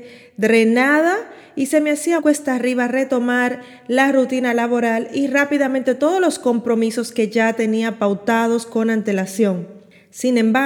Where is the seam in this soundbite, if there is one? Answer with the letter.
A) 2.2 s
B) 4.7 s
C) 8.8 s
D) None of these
A